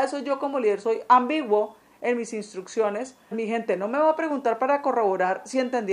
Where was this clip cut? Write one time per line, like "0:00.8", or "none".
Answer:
0:03.3